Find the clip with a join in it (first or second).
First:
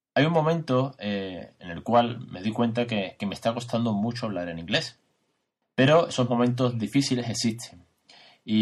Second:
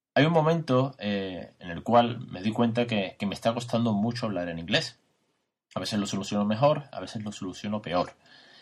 first